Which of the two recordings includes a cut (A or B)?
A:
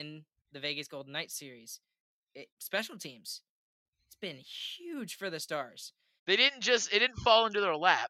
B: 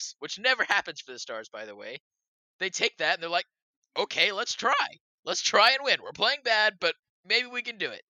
A